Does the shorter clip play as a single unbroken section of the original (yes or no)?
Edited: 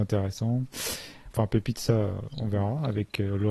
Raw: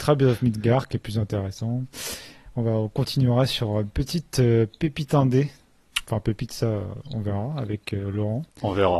no